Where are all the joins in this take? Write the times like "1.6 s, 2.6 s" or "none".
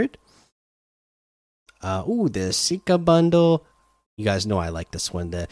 none